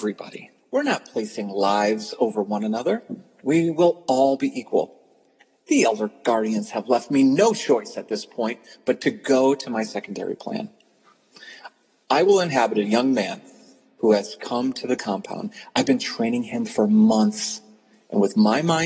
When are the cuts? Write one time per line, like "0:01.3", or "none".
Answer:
none